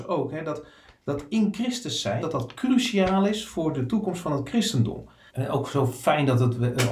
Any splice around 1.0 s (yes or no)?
no